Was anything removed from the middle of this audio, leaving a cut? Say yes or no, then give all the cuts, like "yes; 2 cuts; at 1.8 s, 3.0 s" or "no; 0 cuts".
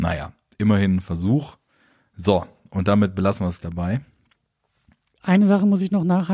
yes; 1 cut; at 3.6 s